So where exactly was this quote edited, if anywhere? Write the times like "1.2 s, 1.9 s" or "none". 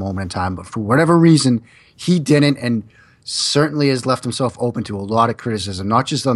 none